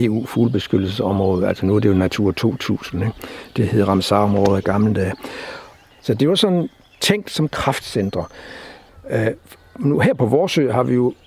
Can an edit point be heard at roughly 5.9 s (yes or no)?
yes